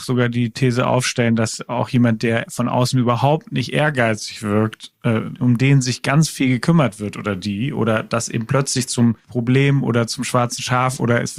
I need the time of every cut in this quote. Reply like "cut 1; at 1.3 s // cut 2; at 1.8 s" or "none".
cut 1; at 5.3 s // cut 2; at 9.2 s

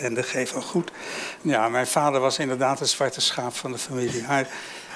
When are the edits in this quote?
cut 1; at 1.4 s

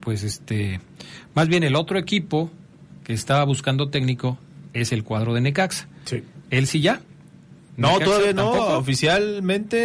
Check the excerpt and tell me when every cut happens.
none

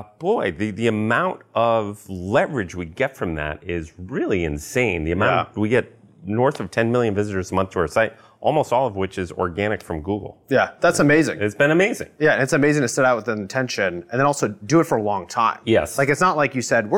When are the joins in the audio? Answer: none

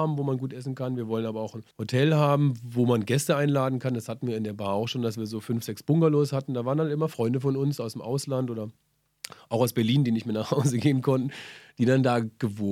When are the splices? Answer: cut 1; at 1.7 s

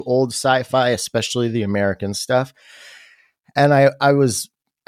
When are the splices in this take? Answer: none

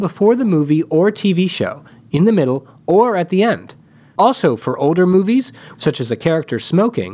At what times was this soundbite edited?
cut 1; at 4.2 s // cut 2; at 5.7 s

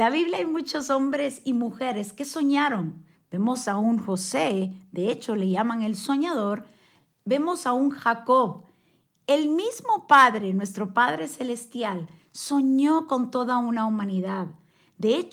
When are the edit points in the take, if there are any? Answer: none

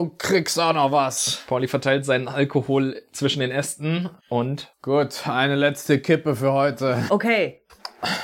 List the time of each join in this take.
cut 1; at 4.2 s // cut 2; at 7.1 s

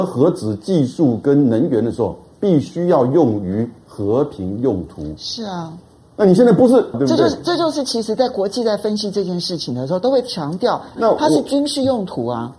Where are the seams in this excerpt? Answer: cut 1; at 6.9 s // cut 2; at 11.0 s

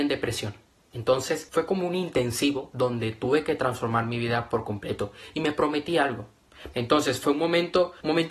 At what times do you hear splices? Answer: cut 1; at 0.9 s // cut 2; at 6.7 s

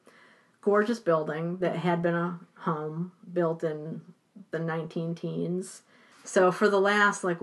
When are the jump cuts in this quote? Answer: cut 1; at 6.1 s

